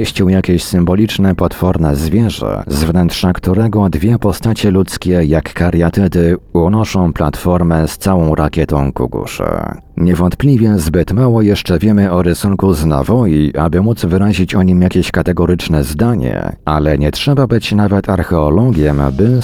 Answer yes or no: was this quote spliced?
no